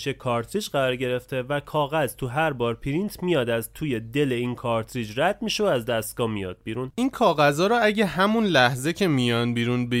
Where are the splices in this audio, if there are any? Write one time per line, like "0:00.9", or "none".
0:06.9